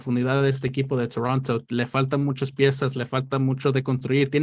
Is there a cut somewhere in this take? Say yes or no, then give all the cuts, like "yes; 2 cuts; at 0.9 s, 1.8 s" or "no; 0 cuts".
no; 0 cuts